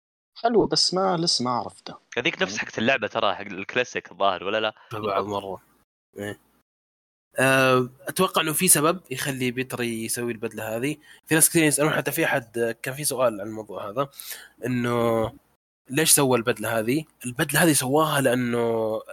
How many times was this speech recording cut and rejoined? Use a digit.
1